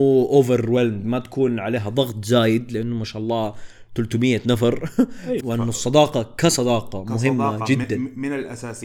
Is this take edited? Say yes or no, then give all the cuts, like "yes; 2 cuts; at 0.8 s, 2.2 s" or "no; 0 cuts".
yes; 1 cut; at 5.4 s